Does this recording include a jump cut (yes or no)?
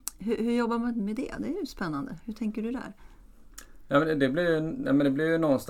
no